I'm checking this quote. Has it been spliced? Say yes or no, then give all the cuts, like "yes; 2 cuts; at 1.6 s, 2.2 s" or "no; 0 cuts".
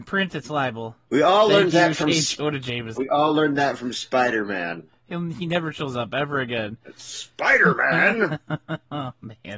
yes; 3 cuts; at 1.1 s, 3.0 s, 4.9 s